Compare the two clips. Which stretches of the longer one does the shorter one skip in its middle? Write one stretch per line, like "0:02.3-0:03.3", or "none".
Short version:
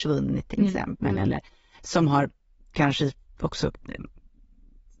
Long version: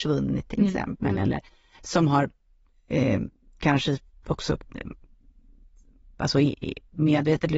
0:02.6-0:03.5

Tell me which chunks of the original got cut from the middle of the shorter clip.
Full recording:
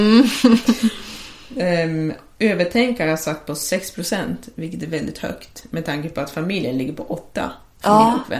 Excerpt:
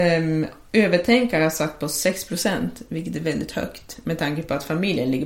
none

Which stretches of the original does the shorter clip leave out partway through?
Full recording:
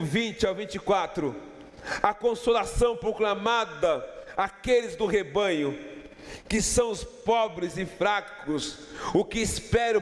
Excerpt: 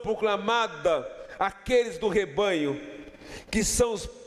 none

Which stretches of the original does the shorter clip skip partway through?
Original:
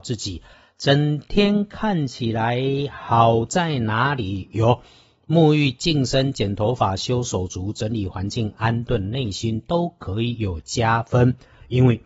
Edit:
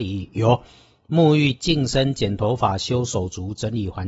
none

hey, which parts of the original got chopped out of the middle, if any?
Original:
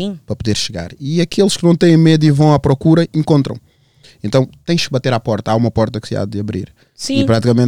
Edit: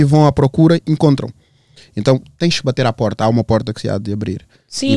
none

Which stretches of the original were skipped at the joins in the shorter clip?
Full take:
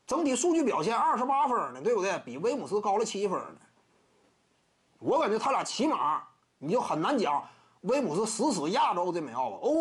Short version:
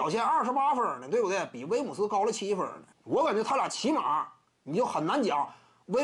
0:03.7-0:04.9

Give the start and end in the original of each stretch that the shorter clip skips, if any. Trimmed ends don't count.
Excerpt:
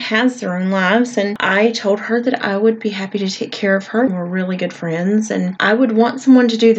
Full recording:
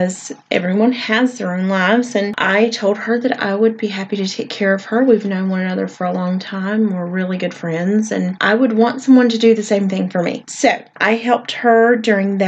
0:05.1-0:06.9

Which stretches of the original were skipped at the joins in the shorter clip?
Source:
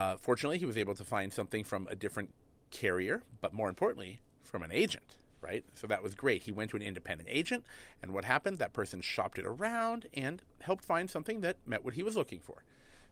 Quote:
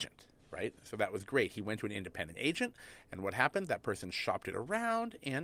none

